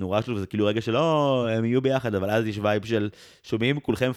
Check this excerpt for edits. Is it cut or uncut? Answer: uncut